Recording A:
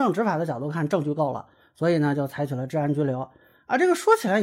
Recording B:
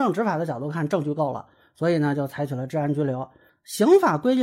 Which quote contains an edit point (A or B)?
B